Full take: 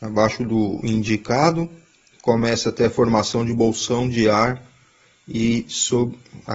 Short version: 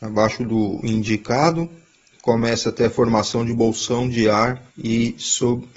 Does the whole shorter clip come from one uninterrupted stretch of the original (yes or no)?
no